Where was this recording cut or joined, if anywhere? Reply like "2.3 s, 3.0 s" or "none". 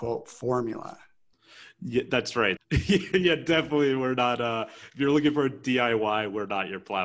2.6 s